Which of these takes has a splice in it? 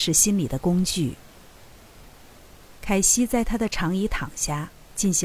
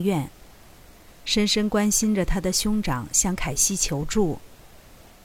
first; 1 cut; at 2.8 s

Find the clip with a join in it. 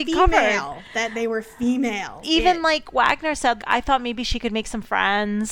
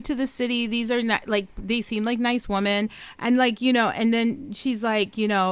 first; 2 cuts; at 2.2 s, 3.6 s

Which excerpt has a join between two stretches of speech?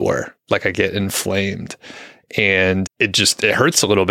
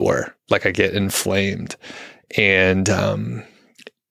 first; 1 cut; at 2.8 s

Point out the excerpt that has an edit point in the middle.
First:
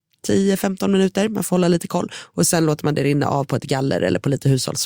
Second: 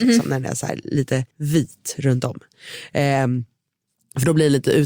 second; 1 cut; at 1.3 s

